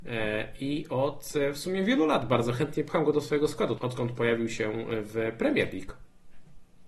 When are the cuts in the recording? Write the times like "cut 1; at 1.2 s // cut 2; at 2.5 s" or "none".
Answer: cut 1; at 3.8 s